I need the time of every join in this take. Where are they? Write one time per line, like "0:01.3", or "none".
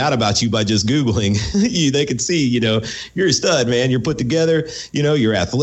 none